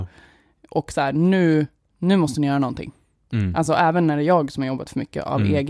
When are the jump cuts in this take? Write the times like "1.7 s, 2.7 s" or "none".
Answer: none